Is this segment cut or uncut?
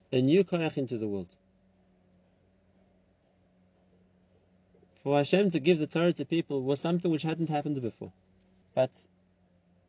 cut